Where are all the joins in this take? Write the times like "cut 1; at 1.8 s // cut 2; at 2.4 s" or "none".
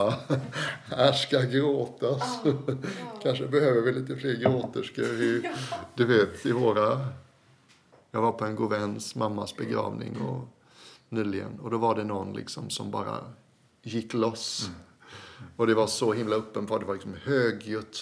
none